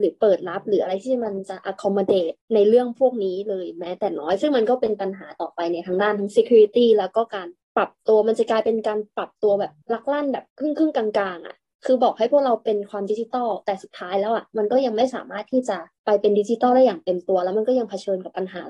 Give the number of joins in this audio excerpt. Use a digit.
1